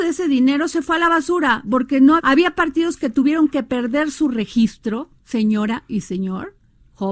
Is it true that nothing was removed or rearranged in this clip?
no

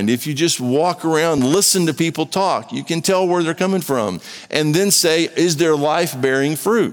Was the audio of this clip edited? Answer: no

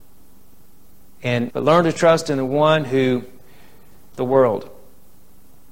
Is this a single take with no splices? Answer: no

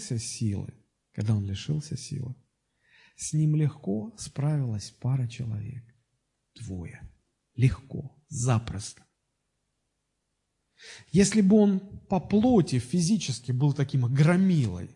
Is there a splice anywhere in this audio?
no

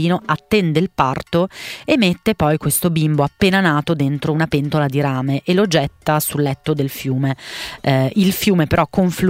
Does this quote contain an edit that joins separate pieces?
no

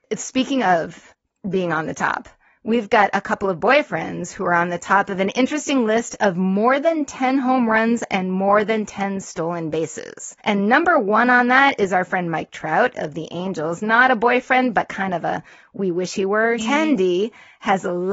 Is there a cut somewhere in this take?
yes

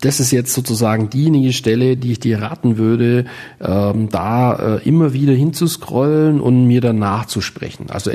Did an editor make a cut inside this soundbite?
no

